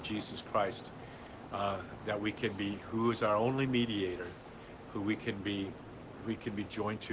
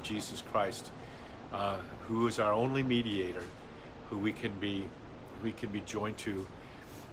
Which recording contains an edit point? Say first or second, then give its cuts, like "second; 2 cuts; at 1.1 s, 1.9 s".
second; 1 cut; at 2.0 s